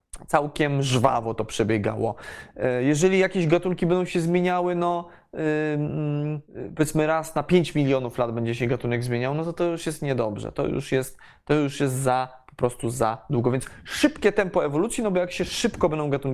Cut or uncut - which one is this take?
cut